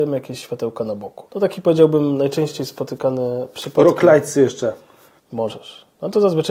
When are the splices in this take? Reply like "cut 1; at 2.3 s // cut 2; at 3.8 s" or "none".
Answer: cut 1; at 5.2 s